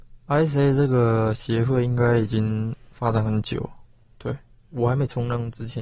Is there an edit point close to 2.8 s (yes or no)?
no